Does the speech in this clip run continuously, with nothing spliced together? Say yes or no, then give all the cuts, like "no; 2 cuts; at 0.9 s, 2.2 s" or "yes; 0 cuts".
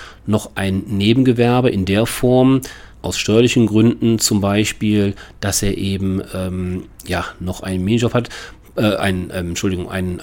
no; 1 cut; at 2.9 s